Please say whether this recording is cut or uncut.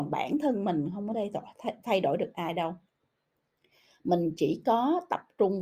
uncut